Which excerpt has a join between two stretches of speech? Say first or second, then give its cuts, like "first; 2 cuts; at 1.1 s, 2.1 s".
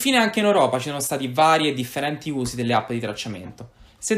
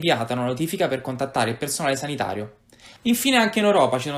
second; 1 cut; at 3.0 s